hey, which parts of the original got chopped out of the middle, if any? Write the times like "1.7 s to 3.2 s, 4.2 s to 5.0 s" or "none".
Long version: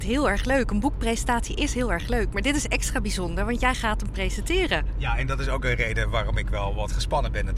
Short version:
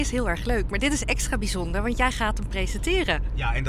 none